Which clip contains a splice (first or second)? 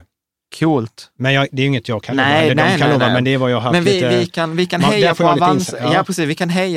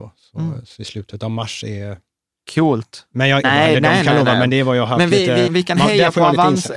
second